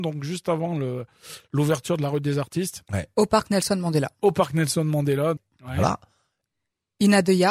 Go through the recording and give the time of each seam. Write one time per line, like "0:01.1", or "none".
0:05.4